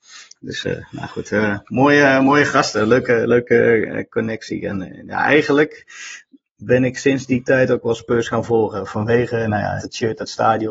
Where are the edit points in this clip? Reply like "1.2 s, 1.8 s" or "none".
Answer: 9.8 s